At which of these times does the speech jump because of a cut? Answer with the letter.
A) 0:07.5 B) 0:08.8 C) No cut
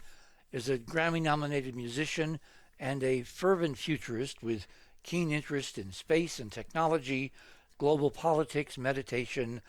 C